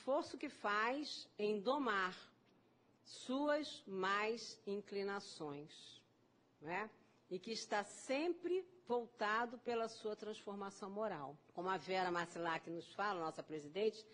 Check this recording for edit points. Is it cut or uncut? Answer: cut